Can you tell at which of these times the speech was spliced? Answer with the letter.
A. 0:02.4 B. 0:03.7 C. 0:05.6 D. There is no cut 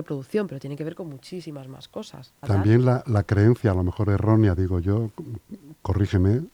A